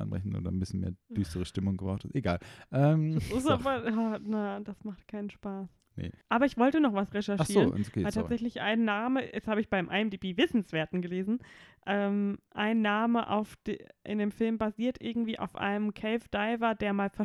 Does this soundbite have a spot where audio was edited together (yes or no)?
yes